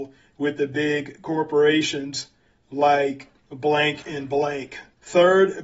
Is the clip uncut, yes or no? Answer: yes